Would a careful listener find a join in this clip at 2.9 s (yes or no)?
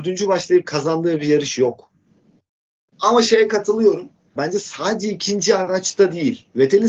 yes